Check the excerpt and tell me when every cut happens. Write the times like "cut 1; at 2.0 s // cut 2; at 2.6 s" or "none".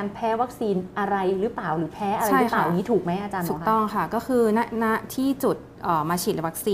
none